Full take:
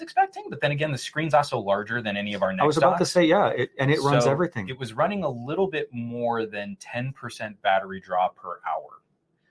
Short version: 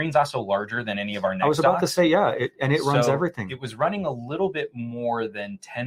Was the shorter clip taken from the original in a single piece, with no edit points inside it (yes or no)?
yes